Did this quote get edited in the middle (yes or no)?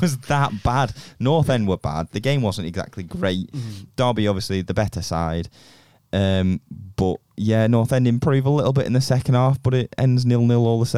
no